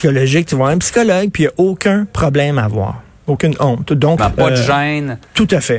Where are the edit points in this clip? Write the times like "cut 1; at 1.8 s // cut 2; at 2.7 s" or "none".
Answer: cut 1; at 4.2 s